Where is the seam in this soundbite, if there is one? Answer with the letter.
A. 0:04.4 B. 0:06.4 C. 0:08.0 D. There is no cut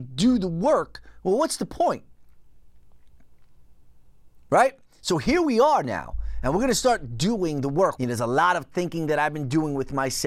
C